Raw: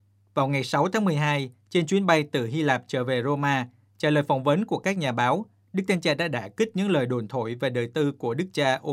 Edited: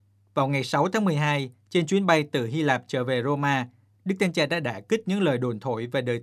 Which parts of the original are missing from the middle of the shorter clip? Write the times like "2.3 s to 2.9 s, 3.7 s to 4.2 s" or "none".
3.9 s to 5.6 s